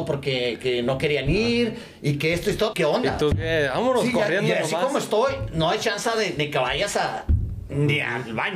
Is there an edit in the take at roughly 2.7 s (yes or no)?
yes